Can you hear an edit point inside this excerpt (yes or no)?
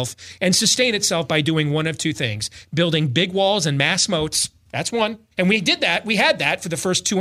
yes